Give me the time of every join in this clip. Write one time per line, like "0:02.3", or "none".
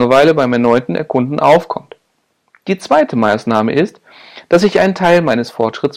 none